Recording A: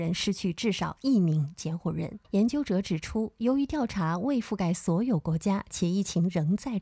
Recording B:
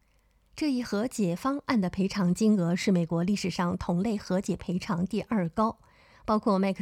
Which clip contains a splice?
A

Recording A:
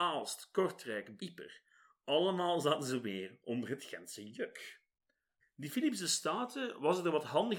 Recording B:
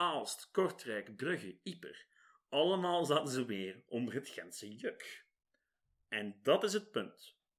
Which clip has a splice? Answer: A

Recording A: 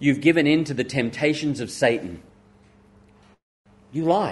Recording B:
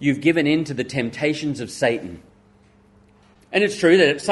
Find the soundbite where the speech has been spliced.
B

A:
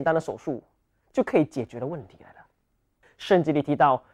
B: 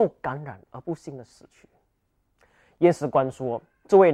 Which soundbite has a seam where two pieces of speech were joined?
A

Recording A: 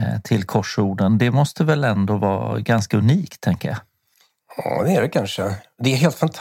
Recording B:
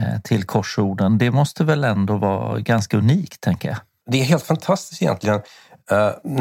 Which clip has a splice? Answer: B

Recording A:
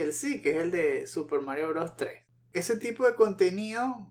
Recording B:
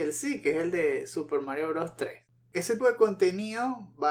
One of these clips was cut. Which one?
B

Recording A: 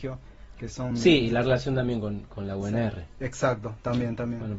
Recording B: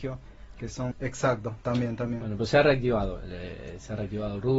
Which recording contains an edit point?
B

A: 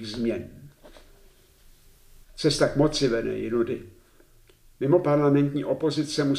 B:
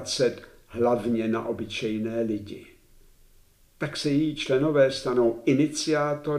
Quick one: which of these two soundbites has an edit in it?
A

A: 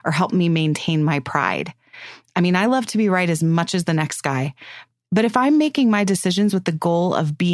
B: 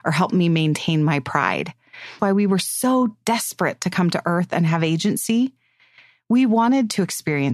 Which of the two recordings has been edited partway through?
B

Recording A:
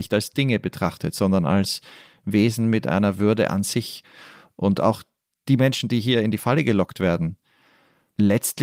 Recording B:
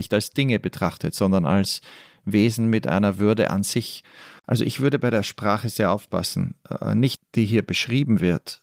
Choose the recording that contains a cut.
B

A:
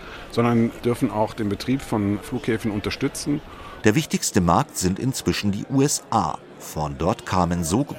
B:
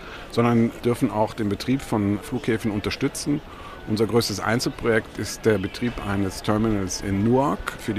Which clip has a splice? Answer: A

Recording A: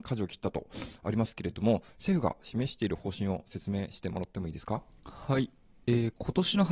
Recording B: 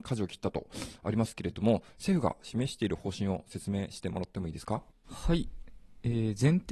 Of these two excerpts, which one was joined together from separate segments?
B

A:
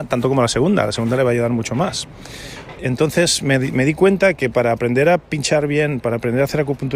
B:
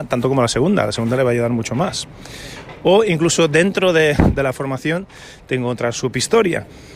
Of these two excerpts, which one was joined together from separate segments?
A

